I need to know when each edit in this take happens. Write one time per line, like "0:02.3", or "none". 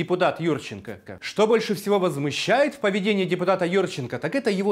0:01.1